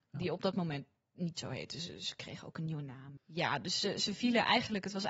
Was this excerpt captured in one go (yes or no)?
yes